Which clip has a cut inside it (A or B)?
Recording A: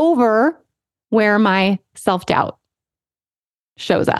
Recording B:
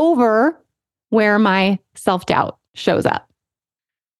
B